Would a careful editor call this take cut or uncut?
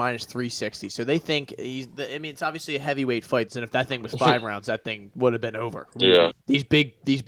cut